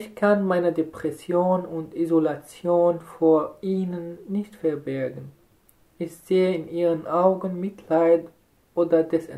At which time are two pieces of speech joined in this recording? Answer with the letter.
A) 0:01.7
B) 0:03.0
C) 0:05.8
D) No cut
D